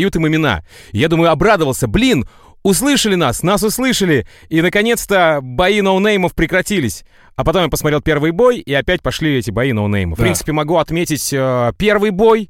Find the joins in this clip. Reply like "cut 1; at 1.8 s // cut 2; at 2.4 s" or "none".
cut 1; at 10.2 s